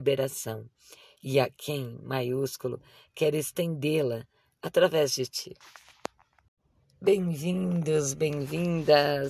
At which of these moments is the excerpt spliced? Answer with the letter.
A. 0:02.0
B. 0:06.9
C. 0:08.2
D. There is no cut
D